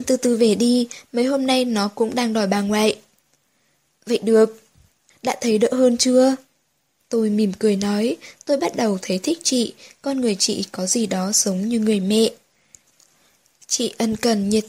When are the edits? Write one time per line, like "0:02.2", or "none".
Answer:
0:05.1
0:07.0